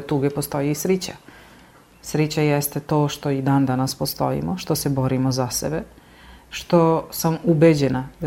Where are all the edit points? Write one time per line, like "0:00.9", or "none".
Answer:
none